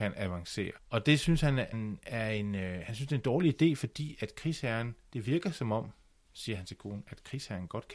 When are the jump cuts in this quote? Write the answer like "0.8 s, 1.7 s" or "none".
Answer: 1.7 s